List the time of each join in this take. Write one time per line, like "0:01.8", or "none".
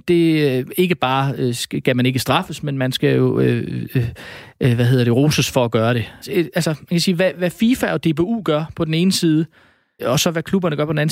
0:06.2
0:10.0